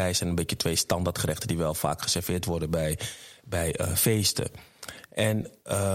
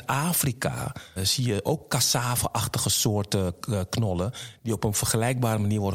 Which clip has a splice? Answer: second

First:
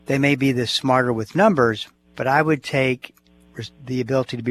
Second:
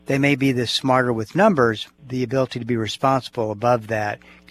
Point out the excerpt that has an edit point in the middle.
second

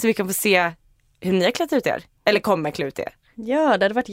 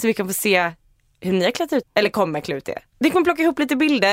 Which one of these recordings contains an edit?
second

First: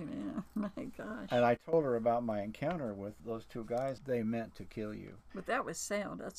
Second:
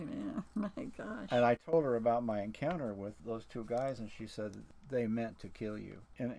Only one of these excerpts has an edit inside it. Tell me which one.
first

